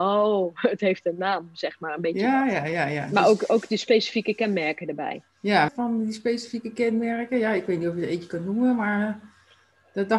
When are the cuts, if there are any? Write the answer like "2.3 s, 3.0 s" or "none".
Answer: 5.7 s